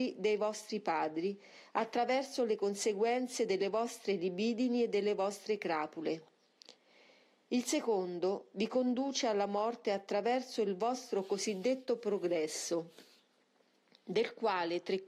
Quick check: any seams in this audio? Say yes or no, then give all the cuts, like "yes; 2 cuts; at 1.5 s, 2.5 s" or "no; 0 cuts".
no; 0 cuts